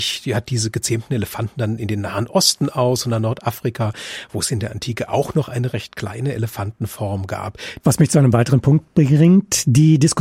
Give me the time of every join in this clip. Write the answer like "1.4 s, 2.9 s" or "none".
7.8 s